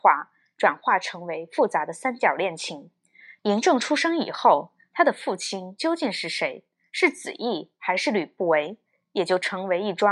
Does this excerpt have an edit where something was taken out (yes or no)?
yes